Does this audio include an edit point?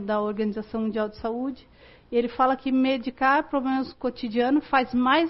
no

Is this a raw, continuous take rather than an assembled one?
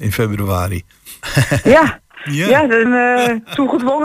no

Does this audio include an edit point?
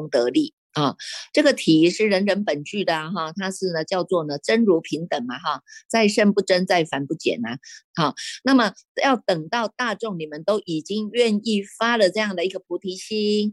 yes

